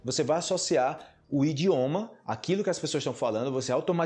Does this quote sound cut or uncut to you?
uncut